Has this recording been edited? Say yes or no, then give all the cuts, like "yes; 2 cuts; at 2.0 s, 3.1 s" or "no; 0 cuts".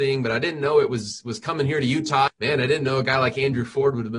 yes; 1 cut; at 2.3 s